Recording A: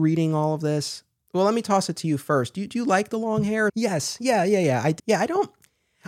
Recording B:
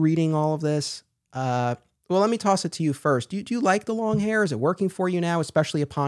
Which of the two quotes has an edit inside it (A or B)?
A